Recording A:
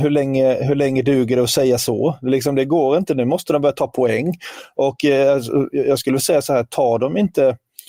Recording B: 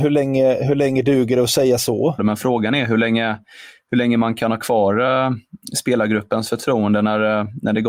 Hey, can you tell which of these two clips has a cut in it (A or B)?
B